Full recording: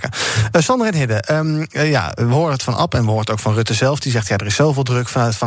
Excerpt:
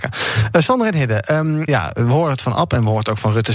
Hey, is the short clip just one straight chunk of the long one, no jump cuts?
no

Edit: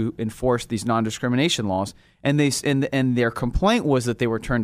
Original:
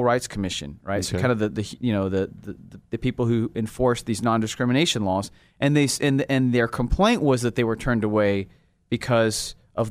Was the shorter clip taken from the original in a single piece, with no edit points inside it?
yes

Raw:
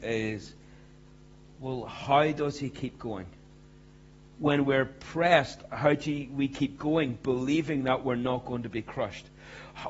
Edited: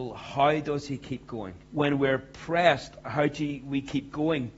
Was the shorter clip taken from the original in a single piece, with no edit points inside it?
no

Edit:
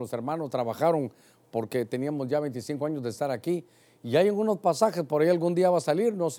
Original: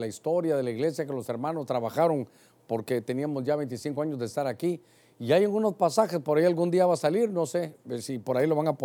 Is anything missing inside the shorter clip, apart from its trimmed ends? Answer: no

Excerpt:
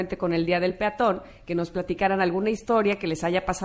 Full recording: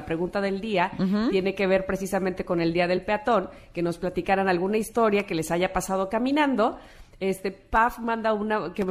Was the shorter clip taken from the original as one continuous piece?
yes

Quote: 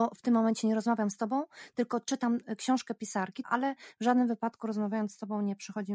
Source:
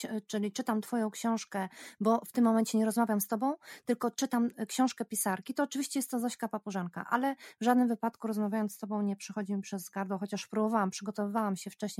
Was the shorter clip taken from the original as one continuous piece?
no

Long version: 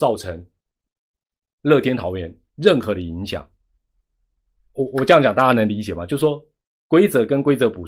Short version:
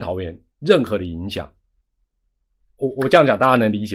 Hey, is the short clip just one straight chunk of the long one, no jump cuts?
yes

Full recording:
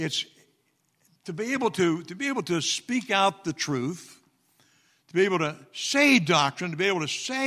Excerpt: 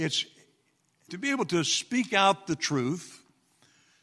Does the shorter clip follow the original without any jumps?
no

